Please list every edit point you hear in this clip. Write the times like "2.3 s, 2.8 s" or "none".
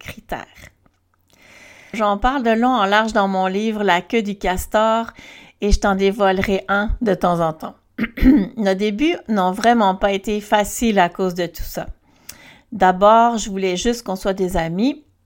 1.9 s

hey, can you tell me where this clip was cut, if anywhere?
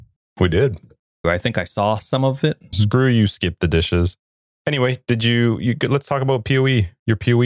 1.2 s, 2.7 s

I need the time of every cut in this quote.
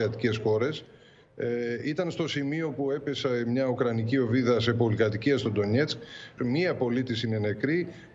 6.4 s

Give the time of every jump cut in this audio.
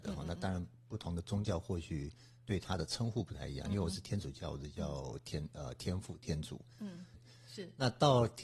7.1 s

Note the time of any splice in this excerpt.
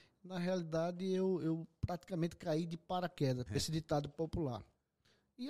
3.5 s

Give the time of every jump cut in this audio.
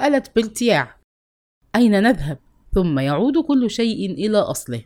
2.6 s

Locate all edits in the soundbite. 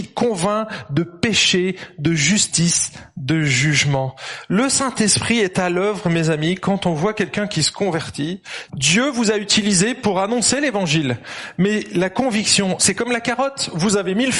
8.7 s, 12.8 s

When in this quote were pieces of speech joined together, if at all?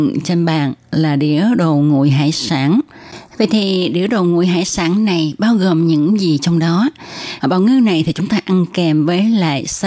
7.4 s

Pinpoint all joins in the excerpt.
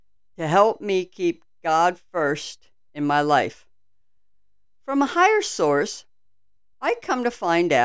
none

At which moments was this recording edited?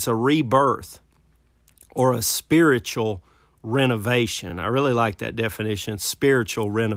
none

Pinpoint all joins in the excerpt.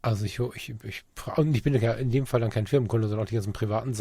none

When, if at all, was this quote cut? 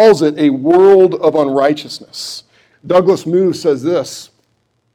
2.7 s

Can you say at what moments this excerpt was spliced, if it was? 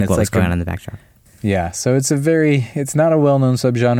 1.3 s

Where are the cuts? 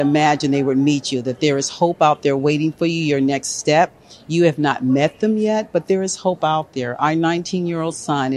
none

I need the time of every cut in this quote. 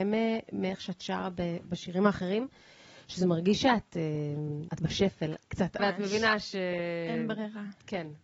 4.7 s, 5.8 s

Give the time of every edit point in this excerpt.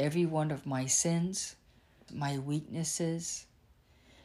2.1 s

